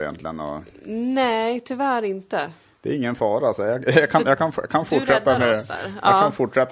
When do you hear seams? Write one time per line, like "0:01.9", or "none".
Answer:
none